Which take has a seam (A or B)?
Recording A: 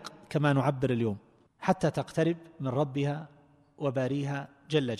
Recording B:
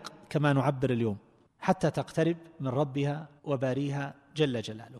B